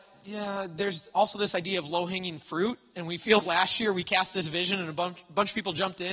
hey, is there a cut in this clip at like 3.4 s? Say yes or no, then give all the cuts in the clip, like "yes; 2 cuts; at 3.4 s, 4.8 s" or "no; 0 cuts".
yes; 1 cut; at 3.4 s